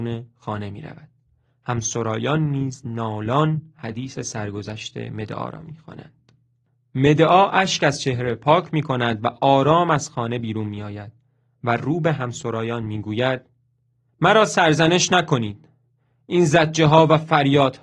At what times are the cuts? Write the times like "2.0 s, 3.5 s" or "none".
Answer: none